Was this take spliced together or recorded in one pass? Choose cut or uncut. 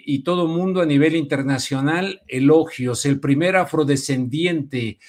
uncut